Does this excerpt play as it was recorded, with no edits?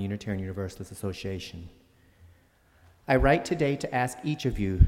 yes; 0 cuts

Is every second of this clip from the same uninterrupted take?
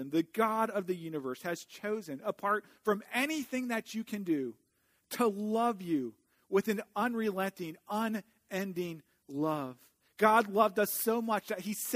yes; 0 cuts

